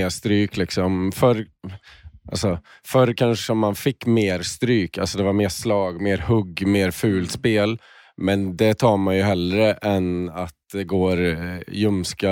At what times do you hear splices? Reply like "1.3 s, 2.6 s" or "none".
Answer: none